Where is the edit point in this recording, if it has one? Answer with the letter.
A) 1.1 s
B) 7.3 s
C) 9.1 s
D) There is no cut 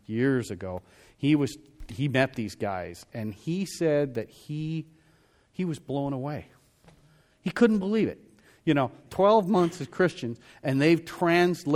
C